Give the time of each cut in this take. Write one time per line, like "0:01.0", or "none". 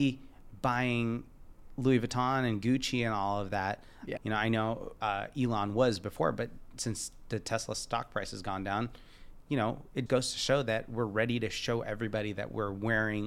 0:04.2
0:10.1